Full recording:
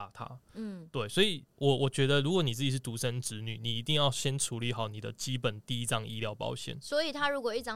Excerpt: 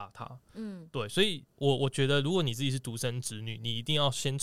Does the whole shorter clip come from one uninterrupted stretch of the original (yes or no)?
yes